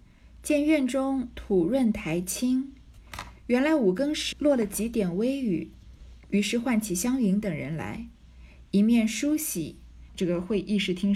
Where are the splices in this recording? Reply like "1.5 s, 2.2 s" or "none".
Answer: 4.3 s, 10.1 s